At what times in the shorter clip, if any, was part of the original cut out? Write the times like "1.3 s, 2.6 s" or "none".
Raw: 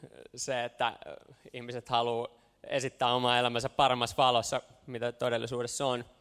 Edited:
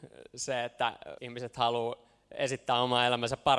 1.2 s